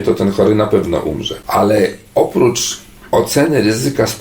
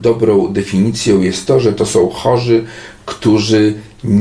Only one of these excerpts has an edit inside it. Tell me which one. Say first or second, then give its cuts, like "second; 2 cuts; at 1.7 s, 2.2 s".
first; 1 cut; at 2.1 s